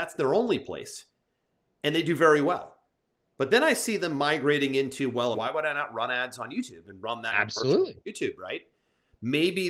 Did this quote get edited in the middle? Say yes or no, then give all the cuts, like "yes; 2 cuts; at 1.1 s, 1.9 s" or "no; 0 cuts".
yes; 1 cut; at 5.3 s